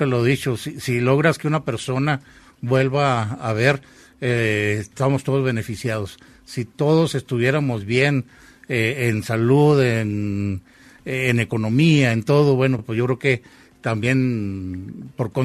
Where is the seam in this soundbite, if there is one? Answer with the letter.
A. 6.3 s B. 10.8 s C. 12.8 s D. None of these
D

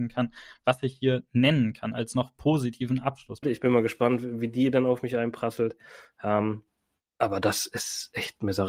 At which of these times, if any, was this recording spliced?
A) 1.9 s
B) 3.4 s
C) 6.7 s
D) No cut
B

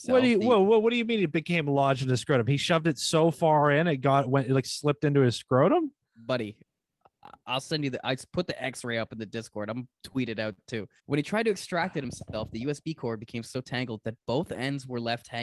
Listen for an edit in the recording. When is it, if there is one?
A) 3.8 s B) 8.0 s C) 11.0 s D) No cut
C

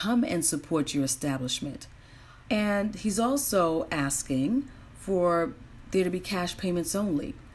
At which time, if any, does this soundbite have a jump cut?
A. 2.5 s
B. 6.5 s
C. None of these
A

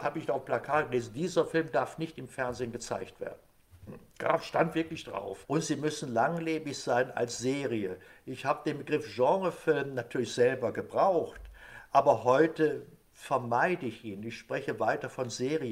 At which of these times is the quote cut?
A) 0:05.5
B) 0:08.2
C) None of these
A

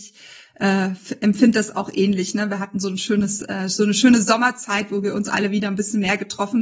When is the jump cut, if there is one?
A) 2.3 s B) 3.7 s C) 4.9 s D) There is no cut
D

